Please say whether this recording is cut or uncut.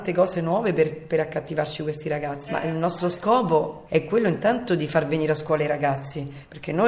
cut